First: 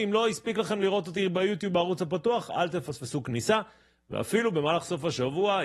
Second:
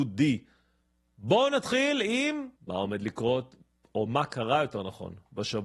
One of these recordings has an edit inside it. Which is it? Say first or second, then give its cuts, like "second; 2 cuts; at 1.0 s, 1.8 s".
second; 1 cut; at 2.6 s